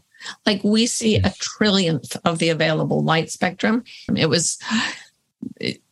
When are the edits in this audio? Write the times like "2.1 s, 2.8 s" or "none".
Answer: 4.1 s